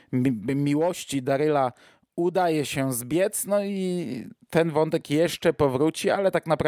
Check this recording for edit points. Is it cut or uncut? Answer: uncut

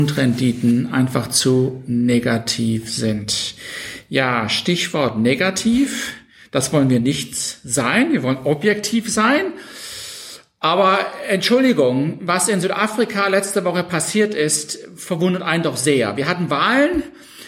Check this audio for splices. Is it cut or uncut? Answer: uncut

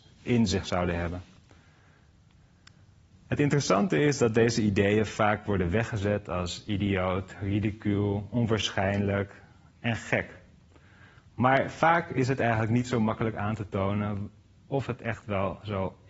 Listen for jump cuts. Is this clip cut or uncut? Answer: uncut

